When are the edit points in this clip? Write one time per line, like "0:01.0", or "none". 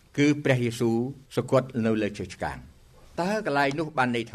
0:01.3